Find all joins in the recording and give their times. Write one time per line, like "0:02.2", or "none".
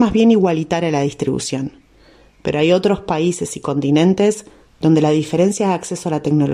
none